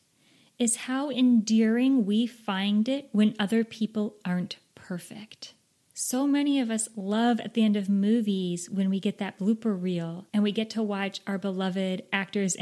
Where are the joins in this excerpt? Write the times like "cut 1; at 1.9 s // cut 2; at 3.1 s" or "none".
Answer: cut 1; at 10.3 s